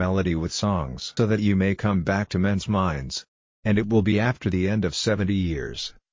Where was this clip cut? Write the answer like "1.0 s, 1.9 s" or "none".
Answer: 1.2 s